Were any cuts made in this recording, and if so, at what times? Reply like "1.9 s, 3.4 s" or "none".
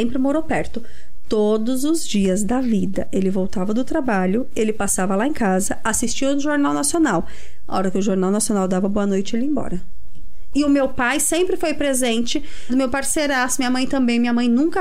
10.5 s, 12.7 s